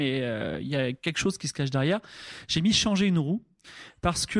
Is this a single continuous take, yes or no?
yes